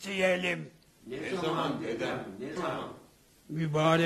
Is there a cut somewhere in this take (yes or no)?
yes